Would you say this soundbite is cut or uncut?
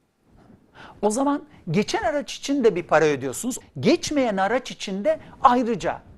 cut